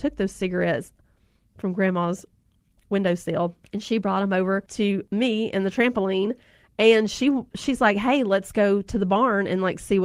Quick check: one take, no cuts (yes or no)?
yes